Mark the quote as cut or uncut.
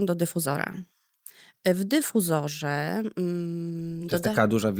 uncut